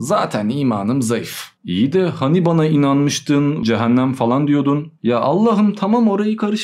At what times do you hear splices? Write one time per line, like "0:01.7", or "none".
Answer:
0:03.6